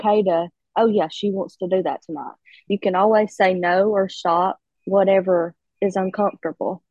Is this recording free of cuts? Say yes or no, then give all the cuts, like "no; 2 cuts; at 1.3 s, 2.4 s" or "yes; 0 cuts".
no; 2 cuts; at 2.7 s, 4.7 s